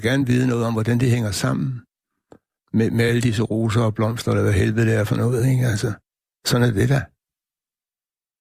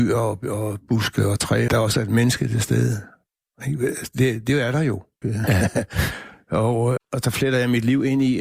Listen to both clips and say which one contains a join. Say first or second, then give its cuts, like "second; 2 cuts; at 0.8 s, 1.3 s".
second; 3 cuts; at 1.7 s, 5.2 s, 7.0 s